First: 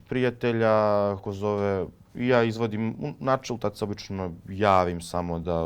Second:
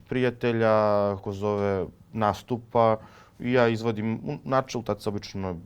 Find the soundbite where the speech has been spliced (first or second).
first